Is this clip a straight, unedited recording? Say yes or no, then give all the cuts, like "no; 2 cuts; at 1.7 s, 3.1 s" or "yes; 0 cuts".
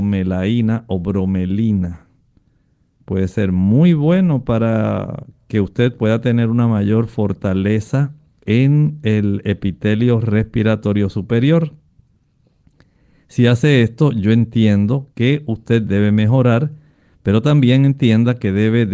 no; 1 cut; at 3.0 s